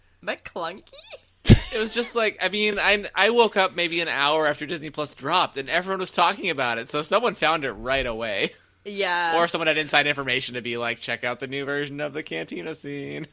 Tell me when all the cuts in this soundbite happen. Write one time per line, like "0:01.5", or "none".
none